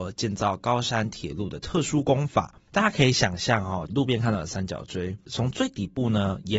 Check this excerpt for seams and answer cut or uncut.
cut